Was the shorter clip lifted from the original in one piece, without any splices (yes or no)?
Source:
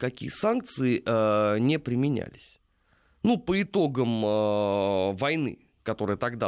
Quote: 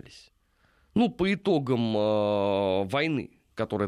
yes